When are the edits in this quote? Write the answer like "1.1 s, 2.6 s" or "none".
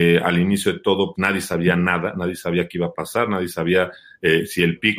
1.2 s